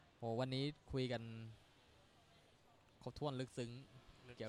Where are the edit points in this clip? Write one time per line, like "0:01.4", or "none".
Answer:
0:03.0